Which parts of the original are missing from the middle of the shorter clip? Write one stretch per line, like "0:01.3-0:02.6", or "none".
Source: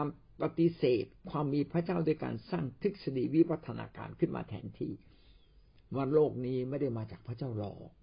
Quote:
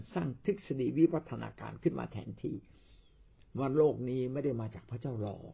none